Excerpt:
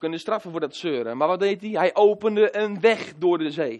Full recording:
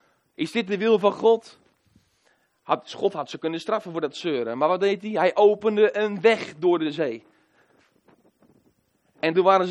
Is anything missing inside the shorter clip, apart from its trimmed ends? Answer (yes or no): no